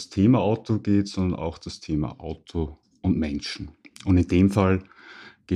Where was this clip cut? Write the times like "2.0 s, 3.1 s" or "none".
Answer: none